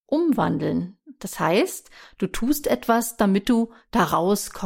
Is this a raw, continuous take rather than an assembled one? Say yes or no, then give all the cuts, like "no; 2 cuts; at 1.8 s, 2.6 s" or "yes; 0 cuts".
yes; 0 cuts